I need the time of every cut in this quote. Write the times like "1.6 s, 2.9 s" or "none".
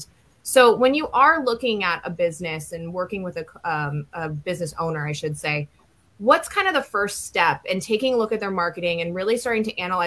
none